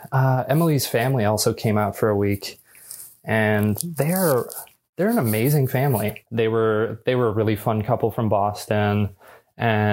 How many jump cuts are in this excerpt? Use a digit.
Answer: 1